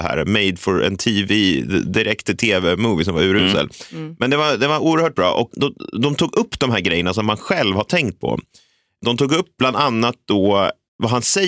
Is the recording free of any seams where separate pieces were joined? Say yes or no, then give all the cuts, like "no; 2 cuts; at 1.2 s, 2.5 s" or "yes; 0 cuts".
no; 1 cut; at 5.5 s